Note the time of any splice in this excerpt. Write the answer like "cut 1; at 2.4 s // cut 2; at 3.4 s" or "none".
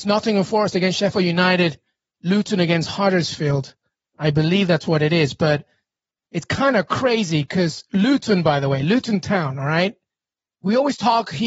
none